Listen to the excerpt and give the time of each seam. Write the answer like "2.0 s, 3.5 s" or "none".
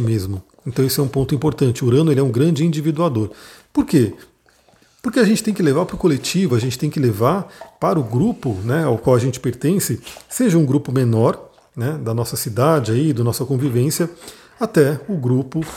none